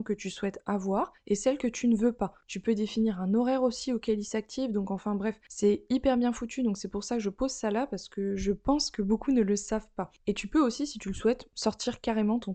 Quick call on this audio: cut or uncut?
uncut